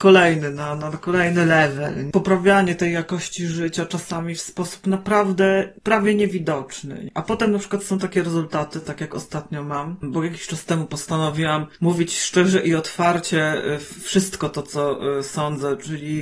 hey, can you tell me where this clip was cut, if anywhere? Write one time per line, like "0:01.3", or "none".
none